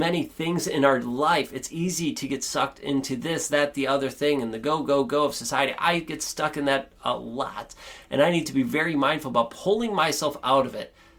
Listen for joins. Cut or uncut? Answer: uncut